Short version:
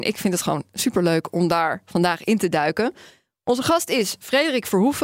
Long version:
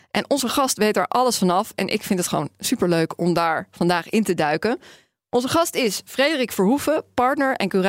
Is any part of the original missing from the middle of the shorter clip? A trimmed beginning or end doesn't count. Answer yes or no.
no